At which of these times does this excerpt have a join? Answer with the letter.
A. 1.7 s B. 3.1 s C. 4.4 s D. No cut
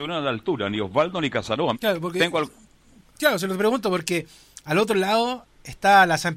A